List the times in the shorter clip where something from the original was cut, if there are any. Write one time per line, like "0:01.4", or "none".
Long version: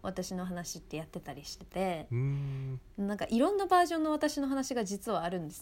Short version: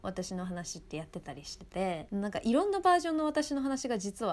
0:02.1